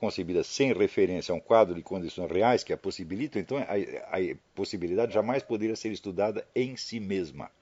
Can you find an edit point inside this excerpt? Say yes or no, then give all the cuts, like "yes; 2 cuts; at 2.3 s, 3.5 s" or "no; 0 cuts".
no; 0 cuts